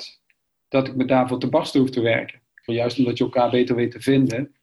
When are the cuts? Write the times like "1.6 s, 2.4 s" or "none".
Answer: 2.7 s

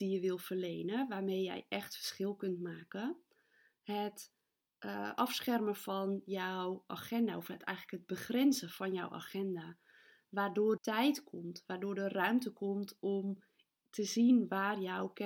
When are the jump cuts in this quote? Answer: 10.8 s

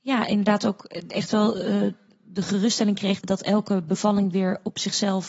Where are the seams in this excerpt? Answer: 3.2 s

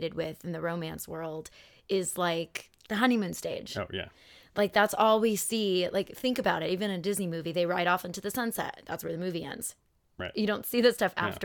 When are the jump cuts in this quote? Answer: none

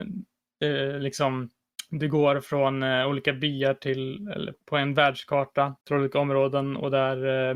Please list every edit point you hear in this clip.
4.5 s, 5.8 s

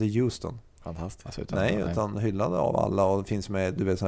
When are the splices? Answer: 1.3 s

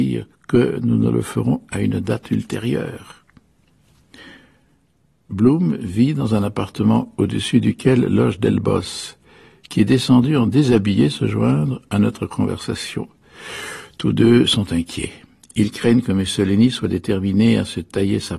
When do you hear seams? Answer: none

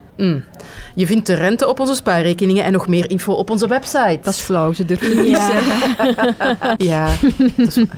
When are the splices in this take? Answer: 6.8 s

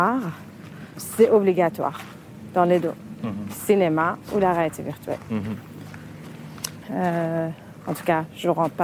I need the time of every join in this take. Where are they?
6.8 s

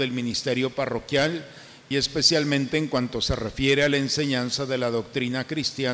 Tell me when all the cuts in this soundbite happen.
1.9 s

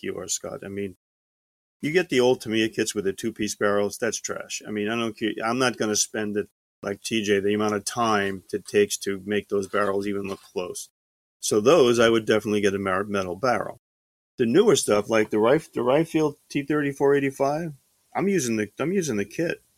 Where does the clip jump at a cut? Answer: none

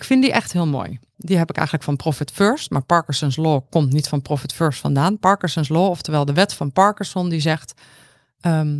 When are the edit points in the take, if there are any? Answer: 1.1 s

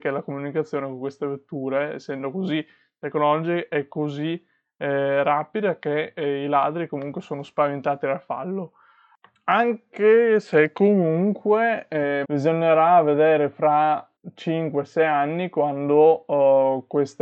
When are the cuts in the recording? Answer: 12.2 s, 14.2 s

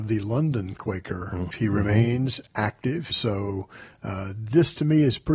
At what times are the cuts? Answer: 1.5 s, 3.1 s

